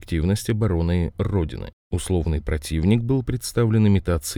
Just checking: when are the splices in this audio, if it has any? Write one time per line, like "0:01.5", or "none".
0:01.8